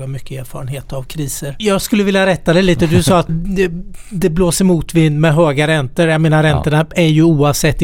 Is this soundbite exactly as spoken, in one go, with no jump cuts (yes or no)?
no